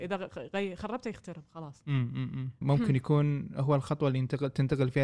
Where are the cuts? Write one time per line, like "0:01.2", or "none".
0:02.6